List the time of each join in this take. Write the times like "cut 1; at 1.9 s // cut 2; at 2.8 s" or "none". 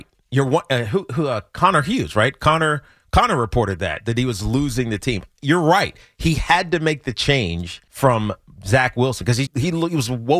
cut 1; at 7.9 s // cut 2; at 9.5 s